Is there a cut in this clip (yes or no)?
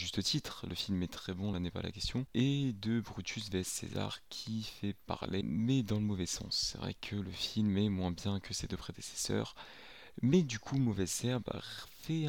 no